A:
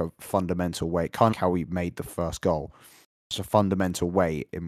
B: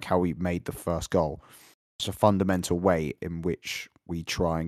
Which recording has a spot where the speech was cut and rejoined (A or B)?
A